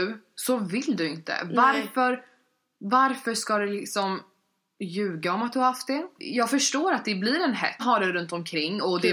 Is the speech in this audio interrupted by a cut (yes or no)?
yes